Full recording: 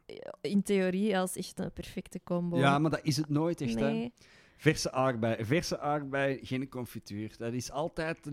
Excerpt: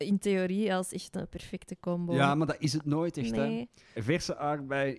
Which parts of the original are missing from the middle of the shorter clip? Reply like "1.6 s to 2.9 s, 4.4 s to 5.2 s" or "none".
4.4 s to 5.4 s